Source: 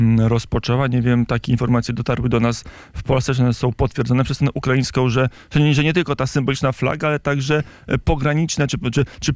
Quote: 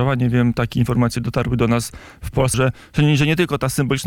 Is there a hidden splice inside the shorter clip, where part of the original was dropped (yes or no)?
yes